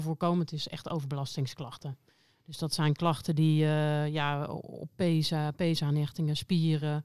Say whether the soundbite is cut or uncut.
uncut